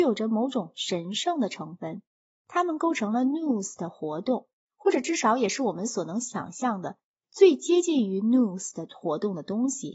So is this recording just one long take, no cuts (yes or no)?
yes